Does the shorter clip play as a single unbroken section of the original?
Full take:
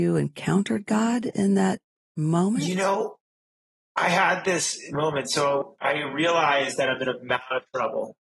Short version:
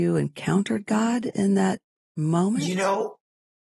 yes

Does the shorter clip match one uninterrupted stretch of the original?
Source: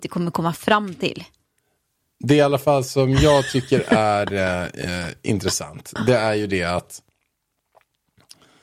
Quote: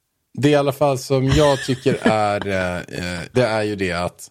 no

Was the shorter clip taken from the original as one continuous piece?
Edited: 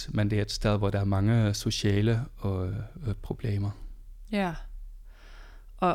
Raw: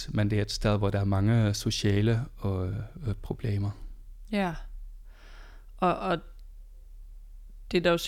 yes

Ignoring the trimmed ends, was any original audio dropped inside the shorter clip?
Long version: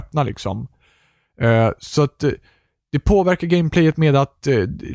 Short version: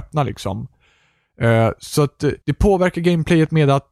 yes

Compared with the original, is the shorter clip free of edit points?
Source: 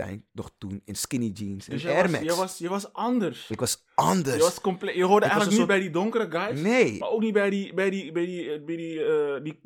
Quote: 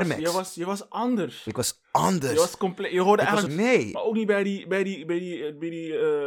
no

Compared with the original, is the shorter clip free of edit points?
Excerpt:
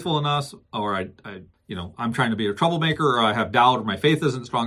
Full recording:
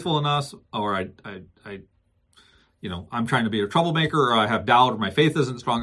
no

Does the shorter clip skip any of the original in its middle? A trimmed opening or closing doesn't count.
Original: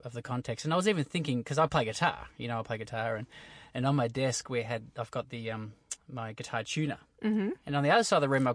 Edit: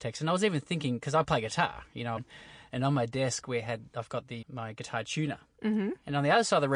yes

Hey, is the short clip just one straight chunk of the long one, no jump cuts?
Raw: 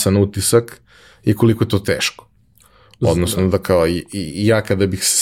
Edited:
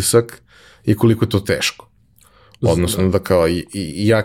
yes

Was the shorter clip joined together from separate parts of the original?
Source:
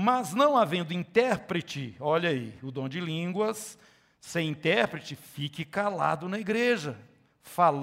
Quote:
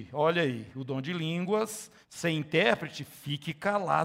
yes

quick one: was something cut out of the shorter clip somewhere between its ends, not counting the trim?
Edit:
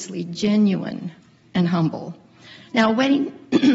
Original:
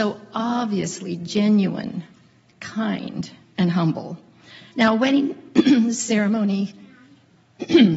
yes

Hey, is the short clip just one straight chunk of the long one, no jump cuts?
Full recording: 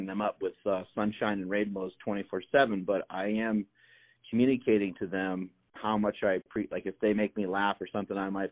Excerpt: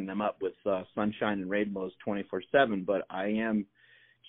yes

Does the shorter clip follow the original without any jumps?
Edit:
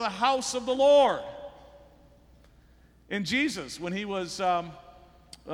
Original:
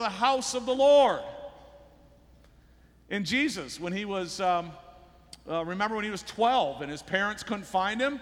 yes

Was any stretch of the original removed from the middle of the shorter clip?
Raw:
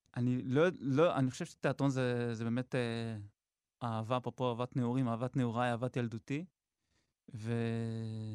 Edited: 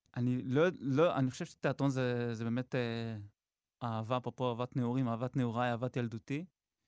no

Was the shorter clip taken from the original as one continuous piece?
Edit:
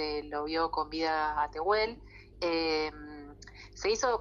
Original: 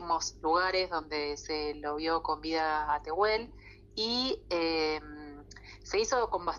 no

